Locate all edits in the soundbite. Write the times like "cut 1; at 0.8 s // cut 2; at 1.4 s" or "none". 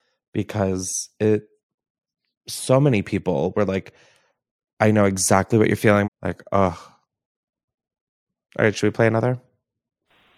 cut 1; at 6.0 s